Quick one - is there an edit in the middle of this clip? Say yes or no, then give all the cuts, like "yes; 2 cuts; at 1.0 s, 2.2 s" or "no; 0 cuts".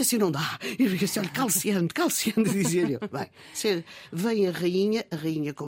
no; 0 cuts